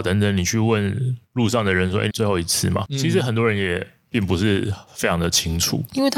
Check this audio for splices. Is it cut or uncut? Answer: cut